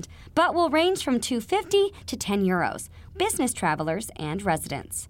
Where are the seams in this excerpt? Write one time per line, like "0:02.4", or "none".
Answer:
0:03.1

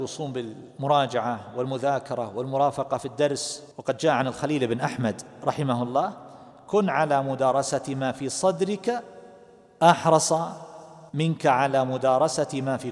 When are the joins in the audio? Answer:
0:03.7
0:11.1

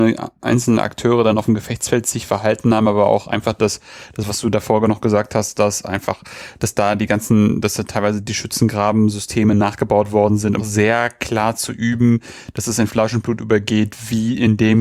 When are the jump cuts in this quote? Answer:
0:10.6

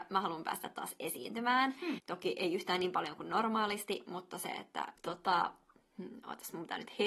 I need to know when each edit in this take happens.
0:02.0
0:05.0

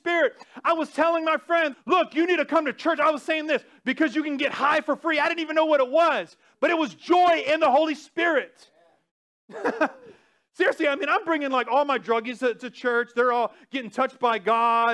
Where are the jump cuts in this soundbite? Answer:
0:01.7
0:12.4

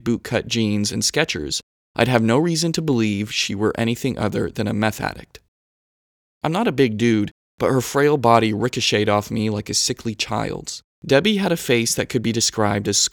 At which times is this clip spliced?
0:06.2
0:10.9

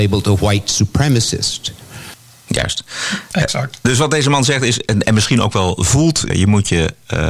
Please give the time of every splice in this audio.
0:06.3

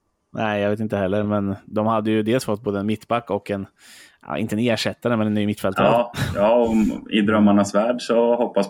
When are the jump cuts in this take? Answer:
none

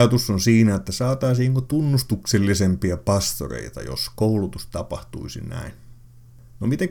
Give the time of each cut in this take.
none

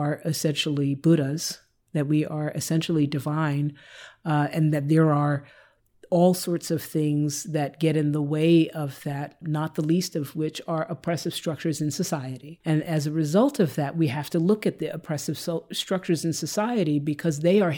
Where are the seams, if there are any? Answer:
0:09.4

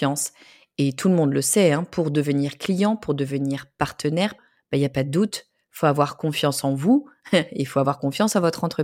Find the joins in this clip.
0:04.4

